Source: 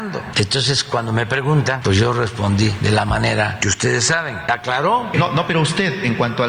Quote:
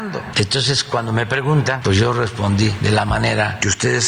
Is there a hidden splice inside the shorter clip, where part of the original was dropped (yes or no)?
no